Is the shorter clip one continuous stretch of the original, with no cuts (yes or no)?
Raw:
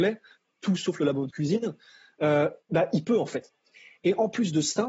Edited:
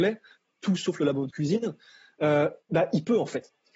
yes